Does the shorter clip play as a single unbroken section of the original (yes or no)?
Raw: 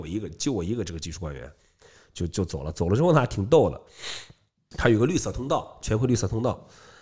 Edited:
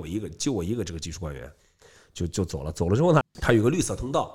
no